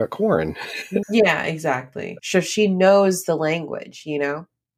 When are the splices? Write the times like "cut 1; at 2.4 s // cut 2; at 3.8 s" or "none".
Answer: cut 1; at 1.0 s // cut 2; at 2.2 s

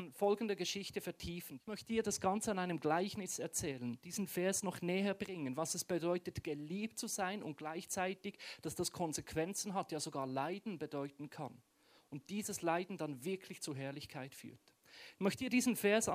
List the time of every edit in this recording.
cut 1; at 1.6 s

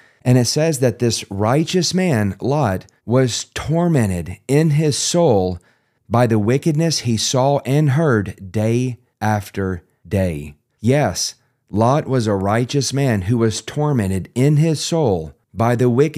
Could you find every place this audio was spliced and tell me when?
cut 1; at 3.0 s // cut 2; at 10.7 s

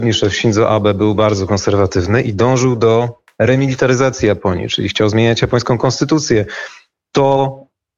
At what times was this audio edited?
none

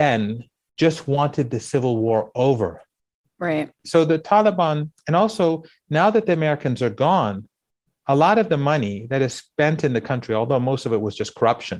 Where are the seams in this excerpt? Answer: cut 1; at 3.8 s

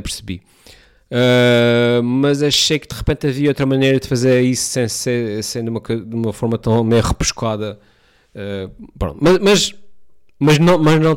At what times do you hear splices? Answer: none

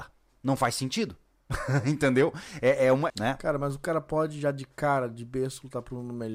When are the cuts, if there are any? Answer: cut 1; at 3.1 s

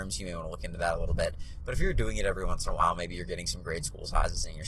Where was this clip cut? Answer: none

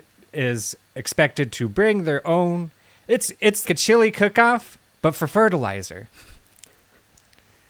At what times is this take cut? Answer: cut 1; at 3.6 s

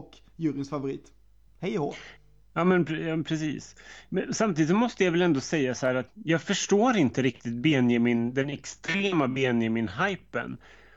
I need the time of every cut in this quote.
cut 1; at 6.1 s

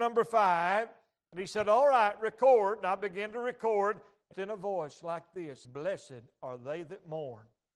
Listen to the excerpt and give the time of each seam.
cut 1; at 4.3 s // cut 2; at 5.6 s

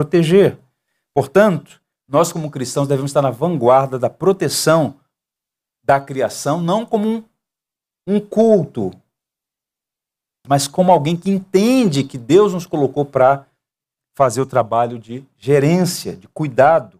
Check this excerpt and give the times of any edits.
cut 1; at 10.4 s

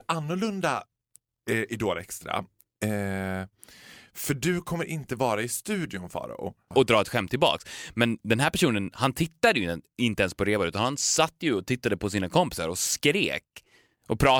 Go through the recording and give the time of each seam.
cut 1; at 6.7 s

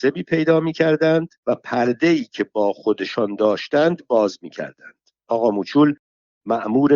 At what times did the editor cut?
cut 1; at 1.4 s // cut 2; at 5.2 s

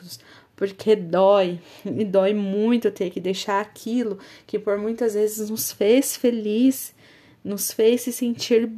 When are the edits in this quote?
none

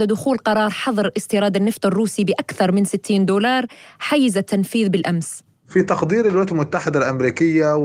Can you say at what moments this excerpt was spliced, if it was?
none

